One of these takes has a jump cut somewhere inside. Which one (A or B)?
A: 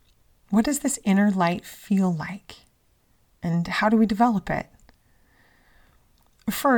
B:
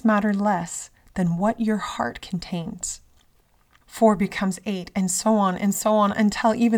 B